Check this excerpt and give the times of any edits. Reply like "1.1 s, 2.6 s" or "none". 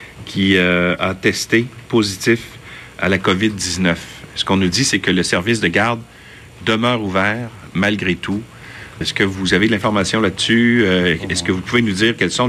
9.0 s

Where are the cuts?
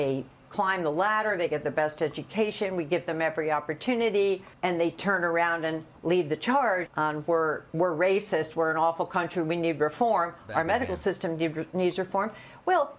6.9 s

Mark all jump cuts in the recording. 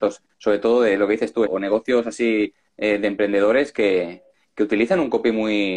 1.5 s

